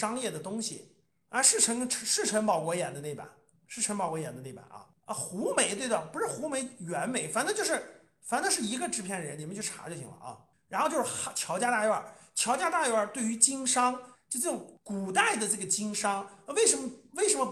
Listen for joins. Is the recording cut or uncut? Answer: cut